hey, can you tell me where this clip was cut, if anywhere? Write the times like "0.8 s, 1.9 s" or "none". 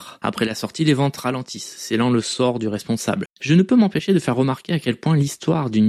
3.3 s